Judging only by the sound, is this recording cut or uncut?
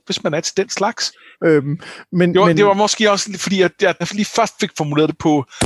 cut